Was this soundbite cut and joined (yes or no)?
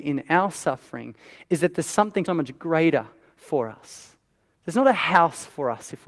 yes